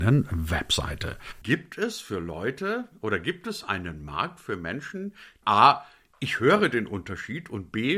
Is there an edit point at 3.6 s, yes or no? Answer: no